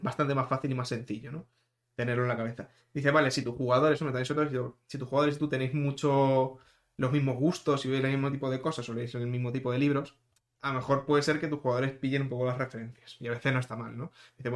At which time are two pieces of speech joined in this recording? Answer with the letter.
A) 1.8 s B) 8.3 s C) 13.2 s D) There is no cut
D